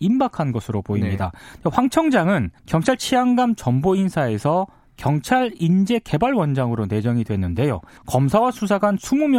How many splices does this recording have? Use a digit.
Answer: 2